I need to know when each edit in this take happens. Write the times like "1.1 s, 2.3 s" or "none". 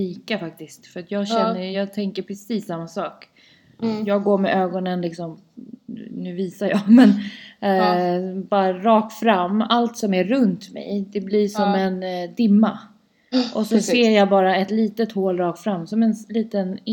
none